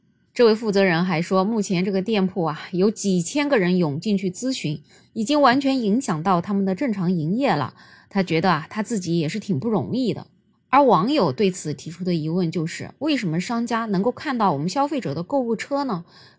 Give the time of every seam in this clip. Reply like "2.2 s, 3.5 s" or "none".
none